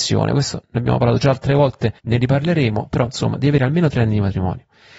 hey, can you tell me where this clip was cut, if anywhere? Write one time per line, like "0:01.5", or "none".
0:02.0